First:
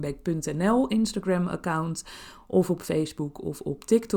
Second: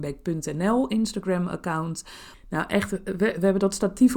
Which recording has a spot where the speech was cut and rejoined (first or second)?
second